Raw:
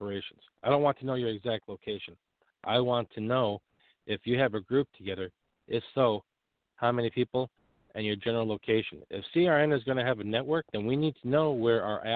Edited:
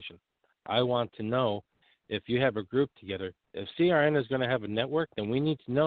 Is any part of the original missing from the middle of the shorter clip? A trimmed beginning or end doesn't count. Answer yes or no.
yes